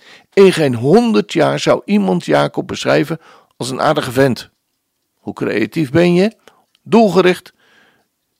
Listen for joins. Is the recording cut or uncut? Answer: cut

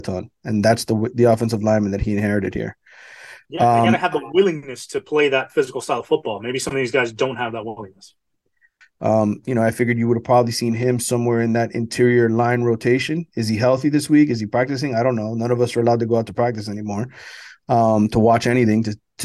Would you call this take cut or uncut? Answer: cut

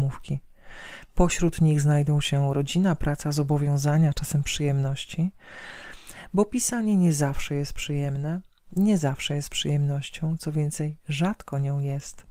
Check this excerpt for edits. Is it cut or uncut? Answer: uncut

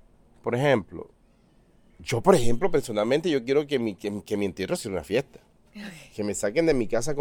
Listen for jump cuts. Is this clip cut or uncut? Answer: uncut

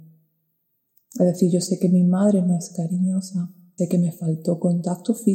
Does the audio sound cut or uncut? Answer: cut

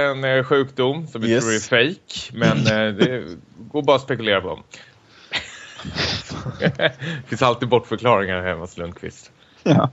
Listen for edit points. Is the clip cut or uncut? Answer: cut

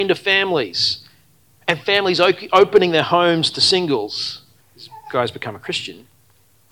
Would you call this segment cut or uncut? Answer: cut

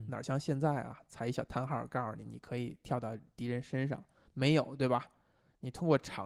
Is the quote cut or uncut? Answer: uncut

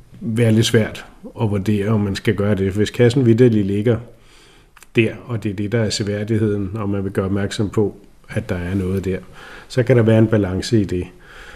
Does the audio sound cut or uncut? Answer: uncut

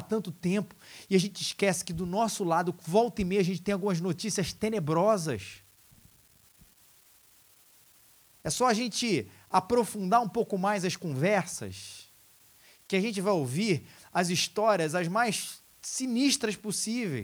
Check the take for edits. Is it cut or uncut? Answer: uncut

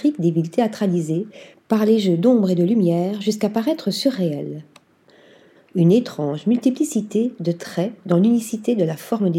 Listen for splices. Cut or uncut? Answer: cut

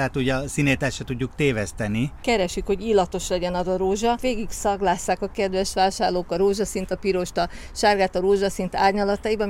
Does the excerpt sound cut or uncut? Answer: uncut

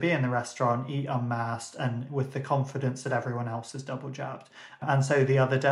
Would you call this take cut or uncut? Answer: cut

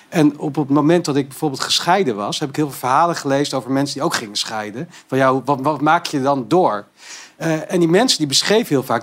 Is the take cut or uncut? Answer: uncut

